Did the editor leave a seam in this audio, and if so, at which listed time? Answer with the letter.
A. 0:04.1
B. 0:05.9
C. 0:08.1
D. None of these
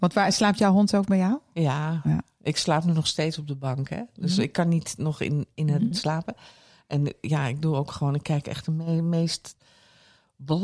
B